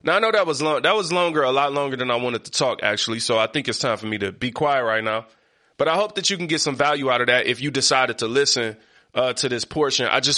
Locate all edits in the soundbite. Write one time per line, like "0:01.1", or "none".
none